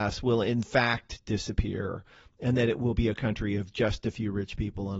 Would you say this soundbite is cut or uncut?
uncut